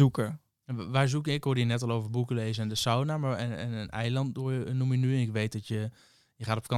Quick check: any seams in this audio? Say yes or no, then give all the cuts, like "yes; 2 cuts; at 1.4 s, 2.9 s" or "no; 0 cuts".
no; 0 cuts